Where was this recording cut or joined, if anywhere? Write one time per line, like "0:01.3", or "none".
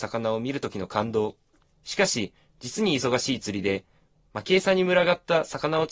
0:01.6